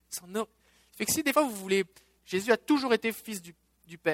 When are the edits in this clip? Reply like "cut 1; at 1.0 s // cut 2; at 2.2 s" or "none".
cut 1; at 2.2 s